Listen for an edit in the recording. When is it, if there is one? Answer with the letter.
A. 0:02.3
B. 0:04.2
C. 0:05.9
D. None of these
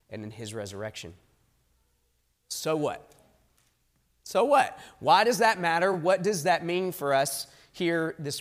D